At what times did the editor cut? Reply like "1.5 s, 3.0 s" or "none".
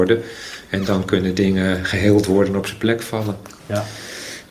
3.6 s